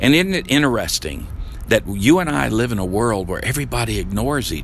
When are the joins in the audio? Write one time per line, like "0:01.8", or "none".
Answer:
none